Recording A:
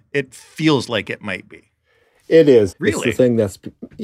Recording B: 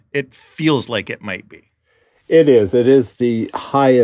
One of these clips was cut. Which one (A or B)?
A